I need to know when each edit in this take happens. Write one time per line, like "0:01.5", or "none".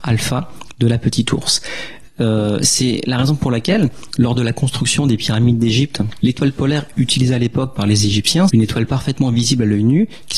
0:06.2
0:08.5